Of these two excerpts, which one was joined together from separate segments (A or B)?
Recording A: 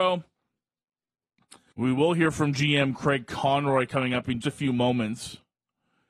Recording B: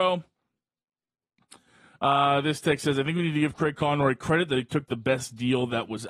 A